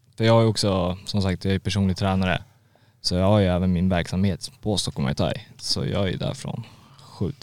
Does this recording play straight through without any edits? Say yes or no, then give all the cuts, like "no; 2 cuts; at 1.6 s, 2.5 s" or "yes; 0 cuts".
yes; 0 cuts